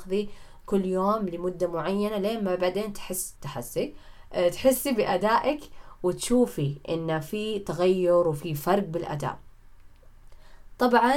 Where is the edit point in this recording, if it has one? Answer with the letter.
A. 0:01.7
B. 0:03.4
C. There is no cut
B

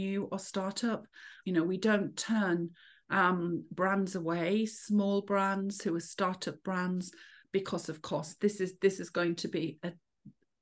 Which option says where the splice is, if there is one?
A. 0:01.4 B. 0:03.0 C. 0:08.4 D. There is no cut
A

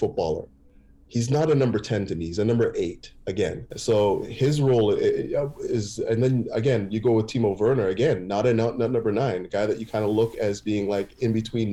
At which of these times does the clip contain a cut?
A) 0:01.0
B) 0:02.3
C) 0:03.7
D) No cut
C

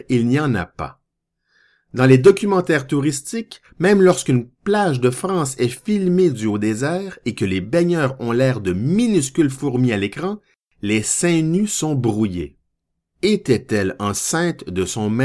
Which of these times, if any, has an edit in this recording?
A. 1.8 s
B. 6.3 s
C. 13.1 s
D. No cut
C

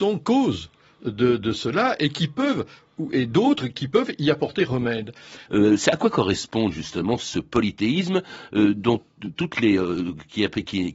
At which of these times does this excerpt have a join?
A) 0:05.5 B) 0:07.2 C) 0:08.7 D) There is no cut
A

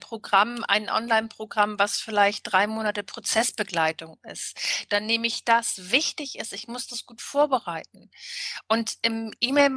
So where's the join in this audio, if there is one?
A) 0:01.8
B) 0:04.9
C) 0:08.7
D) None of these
B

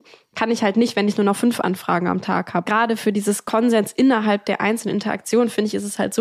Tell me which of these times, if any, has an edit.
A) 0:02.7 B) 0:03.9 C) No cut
A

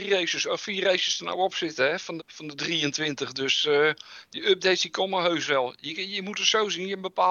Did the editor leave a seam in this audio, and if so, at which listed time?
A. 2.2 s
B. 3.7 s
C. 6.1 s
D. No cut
A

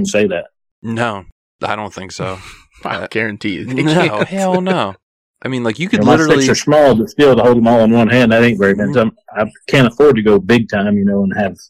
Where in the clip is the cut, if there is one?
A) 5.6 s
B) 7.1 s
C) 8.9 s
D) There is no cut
C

